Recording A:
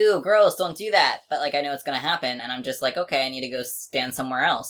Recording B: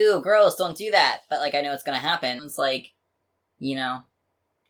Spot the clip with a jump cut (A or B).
B